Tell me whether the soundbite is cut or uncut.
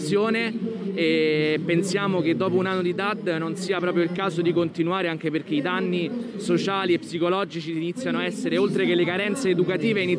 uncut